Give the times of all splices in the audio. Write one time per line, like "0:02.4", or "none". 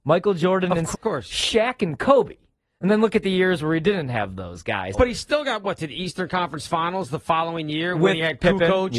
0:00.9
0:04.9